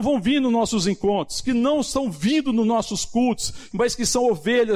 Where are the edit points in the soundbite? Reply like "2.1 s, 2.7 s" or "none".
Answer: 3.7 s